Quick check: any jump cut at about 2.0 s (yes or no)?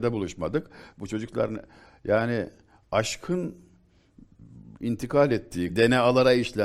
no